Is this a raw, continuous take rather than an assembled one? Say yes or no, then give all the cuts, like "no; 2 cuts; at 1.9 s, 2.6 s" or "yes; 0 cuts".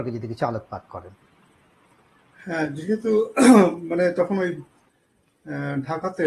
yes; 0 cuts